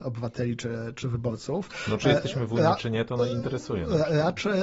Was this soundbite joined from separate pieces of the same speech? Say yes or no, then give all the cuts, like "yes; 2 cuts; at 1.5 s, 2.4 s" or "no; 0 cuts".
no; 0 cuts